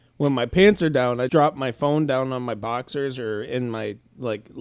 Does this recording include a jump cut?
yes; 1 cut; at 1.3 s

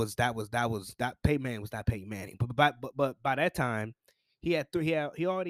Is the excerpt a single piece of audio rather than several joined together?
yes; 0 cuts

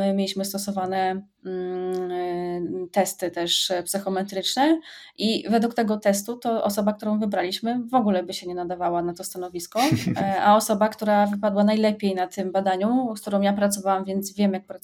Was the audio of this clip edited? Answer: no; 0 cuts

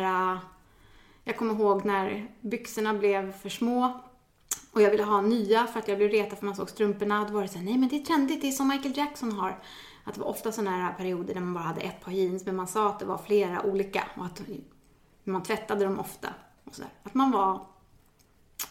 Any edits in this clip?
no; 0 cuts

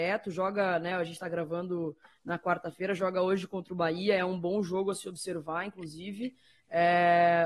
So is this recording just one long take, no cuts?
yes; 0 cuts

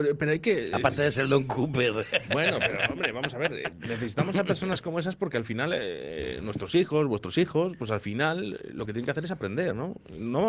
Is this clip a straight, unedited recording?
yes; 0 cuts

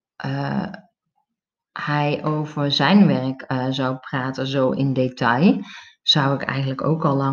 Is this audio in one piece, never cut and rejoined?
yes; 0 cuts

